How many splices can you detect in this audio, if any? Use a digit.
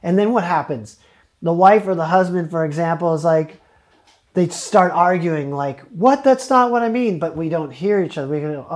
0